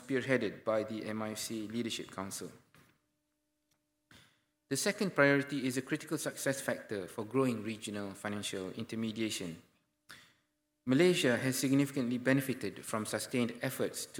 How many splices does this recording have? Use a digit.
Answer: 0